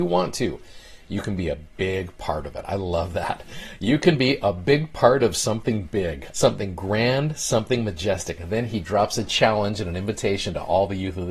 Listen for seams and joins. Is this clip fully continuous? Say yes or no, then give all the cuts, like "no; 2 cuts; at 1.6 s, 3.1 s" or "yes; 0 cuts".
yes; 0 cuts